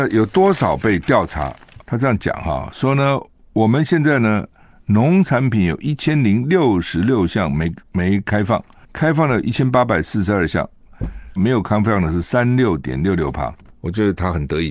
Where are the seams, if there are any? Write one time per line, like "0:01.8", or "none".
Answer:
0:11.4
0:13.6